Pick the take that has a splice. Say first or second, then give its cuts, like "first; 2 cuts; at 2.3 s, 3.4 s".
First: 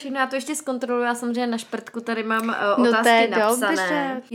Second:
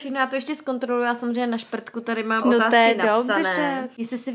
second; 1 cut; at 2.4 s